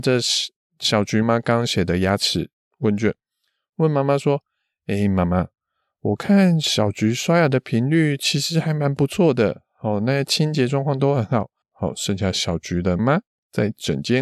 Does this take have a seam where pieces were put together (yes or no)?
yes